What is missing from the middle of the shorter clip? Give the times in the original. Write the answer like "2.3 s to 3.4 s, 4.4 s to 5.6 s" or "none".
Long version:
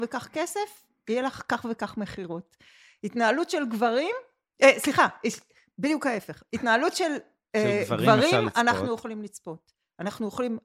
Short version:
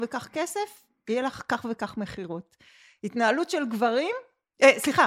none